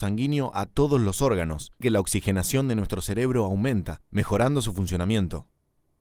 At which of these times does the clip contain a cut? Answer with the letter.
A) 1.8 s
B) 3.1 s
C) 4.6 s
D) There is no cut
A